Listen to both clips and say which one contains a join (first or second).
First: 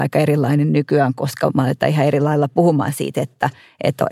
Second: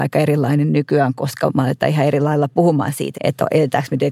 second